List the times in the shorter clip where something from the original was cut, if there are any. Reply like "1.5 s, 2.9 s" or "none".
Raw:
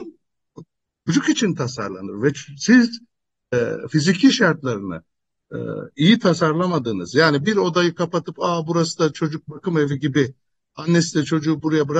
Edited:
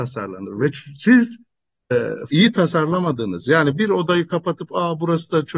2.3 s